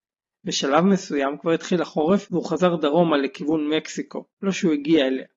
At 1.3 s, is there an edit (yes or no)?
no